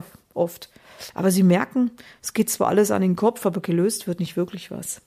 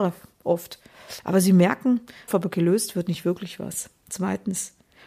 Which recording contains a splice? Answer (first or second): second